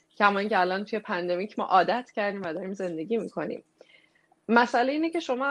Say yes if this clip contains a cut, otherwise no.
no